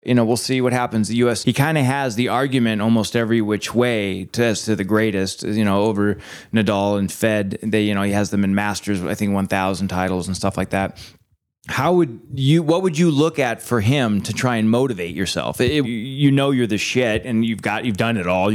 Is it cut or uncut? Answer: cut